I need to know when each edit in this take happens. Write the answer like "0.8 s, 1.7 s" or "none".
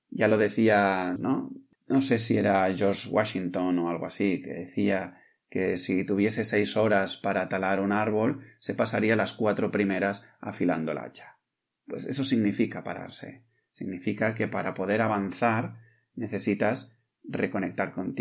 1.2 s